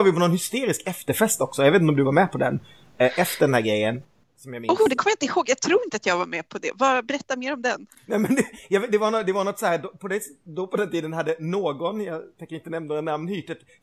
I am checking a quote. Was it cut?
no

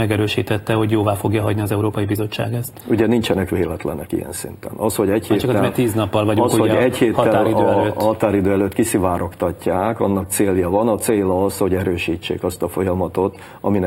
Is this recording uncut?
yes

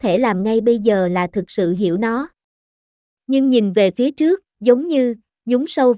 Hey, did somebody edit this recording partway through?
yes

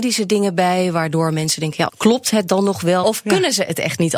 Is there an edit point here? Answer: yes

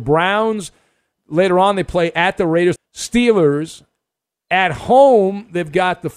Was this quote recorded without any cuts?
no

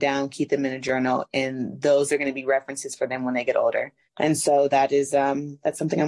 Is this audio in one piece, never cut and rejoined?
no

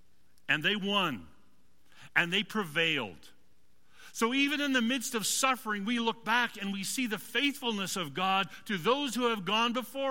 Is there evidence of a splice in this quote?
no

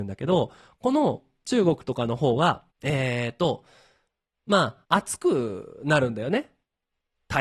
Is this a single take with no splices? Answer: no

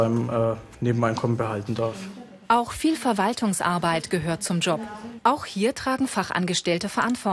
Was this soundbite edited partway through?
yes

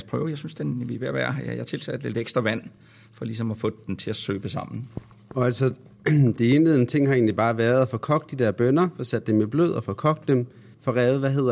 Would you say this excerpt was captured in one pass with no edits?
yes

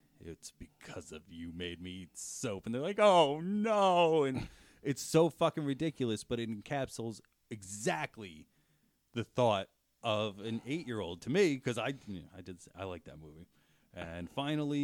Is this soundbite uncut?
yes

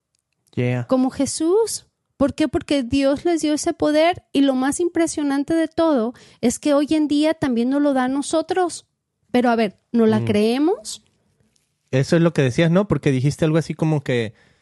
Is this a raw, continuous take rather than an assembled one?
yes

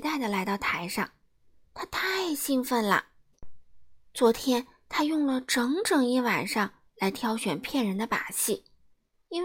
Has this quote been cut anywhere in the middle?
no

